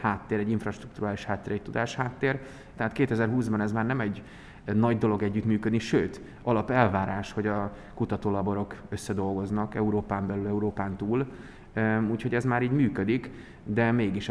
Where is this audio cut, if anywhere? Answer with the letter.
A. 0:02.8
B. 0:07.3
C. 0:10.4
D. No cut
A